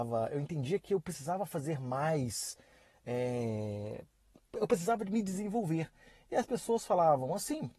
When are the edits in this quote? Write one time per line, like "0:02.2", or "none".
none